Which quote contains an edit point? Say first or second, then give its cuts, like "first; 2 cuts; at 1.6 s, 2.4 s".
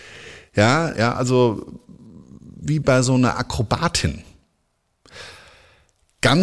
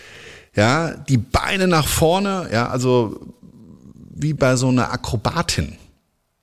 first; 1 cut; at 0.9 s